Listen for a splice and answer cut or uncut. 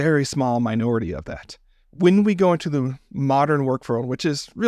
uncut